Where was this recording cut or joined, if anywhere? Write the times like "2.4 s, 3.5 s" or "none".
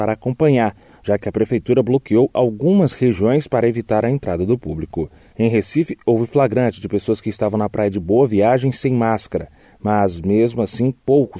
none